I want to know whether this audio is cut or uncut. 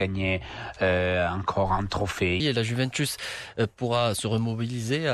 cut